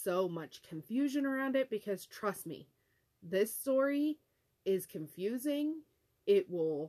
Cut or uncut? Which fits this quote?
uncut